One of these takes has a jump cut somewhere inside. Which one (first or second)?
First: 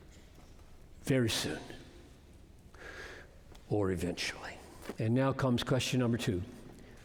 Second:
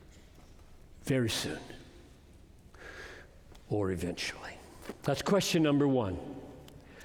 first